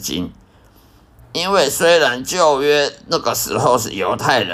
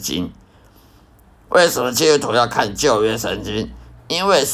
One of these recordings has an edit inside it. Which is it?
first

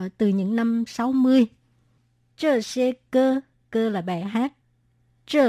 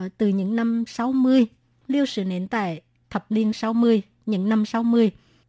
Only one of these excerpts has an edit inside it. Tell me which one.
second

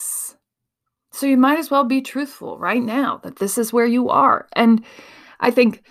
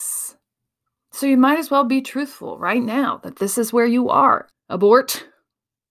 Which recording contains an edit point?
second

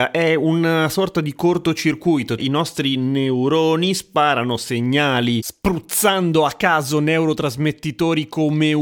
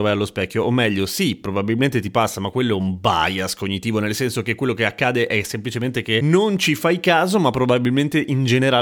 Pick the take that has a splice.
first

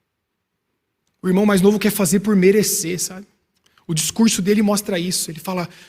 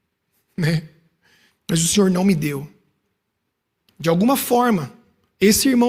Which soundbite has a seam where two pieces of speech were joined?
second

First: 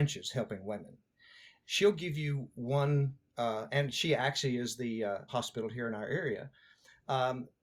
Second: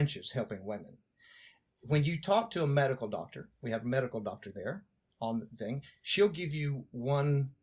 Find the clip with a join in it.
first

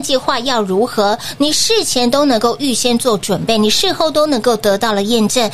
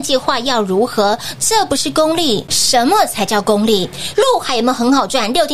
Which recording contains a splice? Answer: second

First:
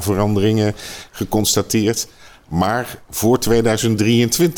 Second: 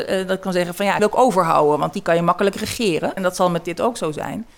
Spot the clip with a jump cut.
second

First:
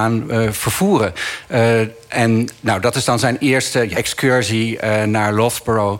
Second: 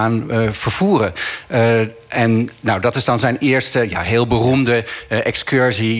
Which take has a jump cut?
first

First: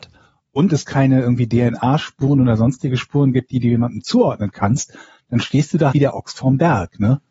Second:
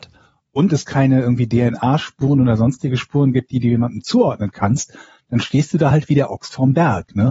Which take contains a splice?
first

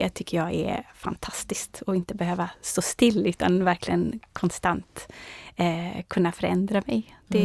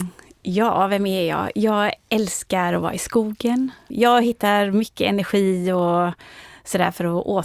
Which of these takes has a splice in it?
second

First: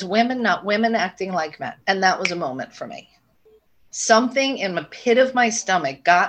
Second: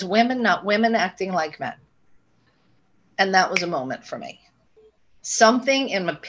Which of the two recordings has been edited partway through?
first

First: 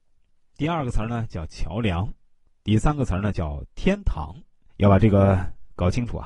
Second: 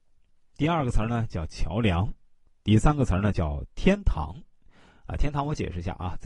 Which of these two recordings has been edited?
first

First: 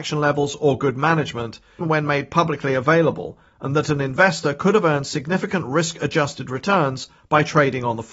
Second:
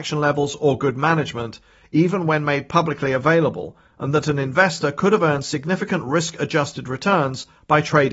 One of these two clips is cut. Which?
first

